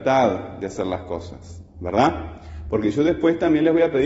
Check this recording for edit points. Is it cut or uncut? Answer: uncut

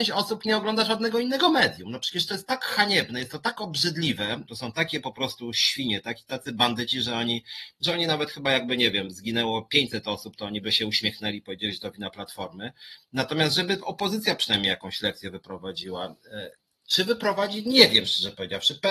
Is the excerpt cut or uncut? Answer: cut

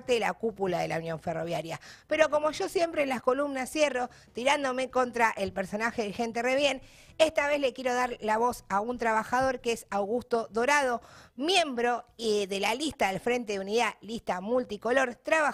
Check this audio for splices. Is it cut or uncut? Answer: uncut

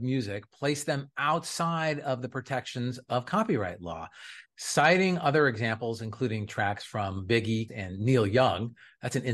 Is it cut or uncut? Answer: cut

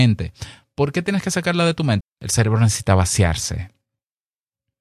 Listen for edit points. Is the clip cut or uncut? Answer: cut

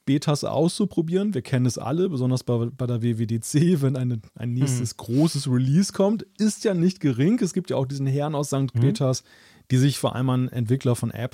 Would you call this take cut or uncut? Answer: cut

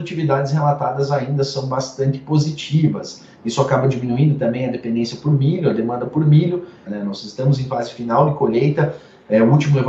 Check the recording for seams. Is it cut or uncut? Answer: cut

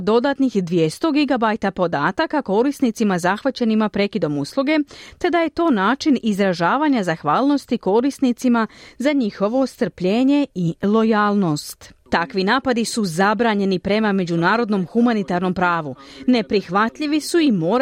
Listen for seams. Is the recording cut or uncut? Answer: cut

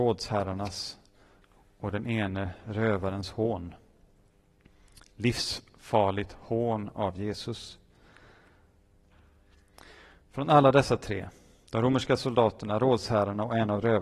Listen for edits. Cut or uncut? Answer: uncut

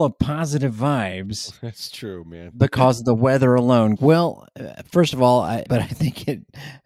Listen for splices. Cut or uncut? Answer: cut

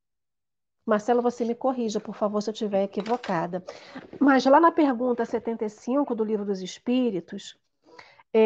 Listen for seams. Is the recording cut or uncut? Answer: uncut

